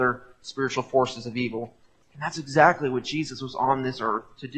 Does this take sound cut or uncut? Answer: uncut